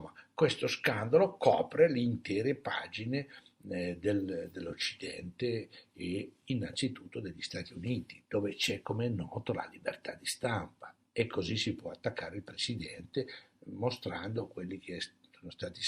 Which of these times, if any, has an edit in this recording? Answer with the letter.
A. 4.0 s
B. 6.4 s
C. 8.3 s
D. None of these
C